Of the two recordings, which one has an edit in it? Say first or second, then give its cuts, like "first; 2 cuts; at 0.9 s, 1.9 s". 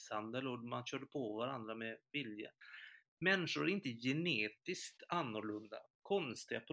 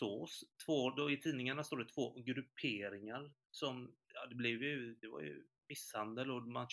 second; 1 cut; at 4.0 s